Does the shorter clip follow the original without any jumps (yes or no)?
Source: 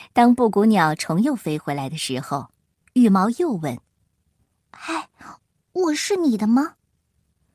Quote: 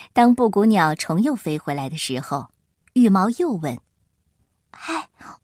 yes